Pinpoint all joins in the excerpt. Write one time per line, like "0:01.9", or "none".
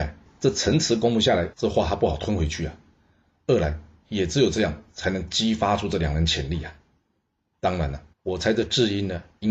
0:01.5
0:08.1